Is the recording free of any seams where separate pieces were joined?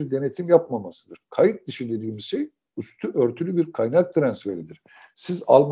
yes; 0 cuts

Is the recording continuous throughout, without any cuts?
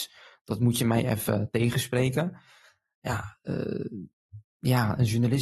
yes; 0 cuts

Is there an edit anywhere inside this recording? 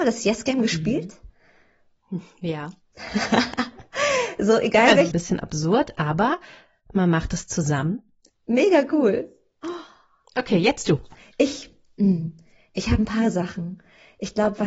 yes; 2 cuts; at 5.1 s, 8.3 s

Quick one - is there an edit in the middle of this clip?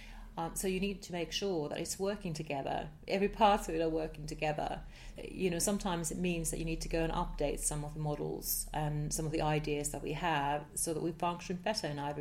no; 0 cuts

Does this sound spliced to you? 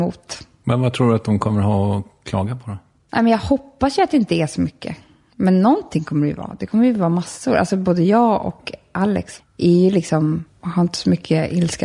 yes; 2 cuts; at 9.4 s, 10.5 s

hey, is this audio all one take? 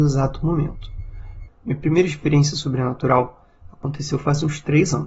no; 1 cut; at 1.5 s

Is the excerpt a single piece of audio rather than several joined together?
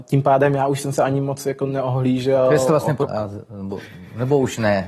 no; 1 cut; at 3.0 s

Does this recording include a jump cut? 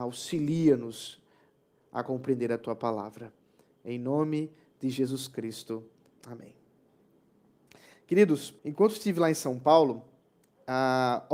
yes; 2 cuts; at 6.2 s, 8.6 s

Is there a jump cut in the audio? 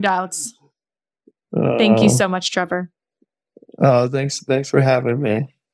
no; 0 cuts

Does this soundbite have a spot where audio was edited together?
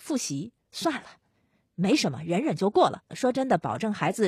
yes; 1 cut; at 3.1 s

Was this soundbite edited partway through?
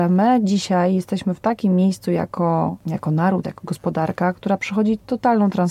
yes; 1 cut; at 3.4 s

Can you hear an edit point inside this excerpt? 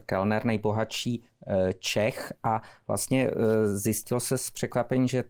no; 0 cuts

